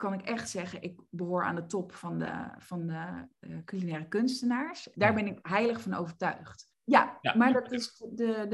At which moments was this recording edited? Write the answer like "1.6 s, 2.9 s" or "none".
4.9 s, 6.7 s